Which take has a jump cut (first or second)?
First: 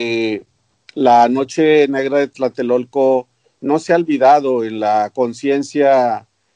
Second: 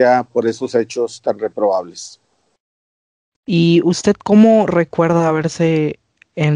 second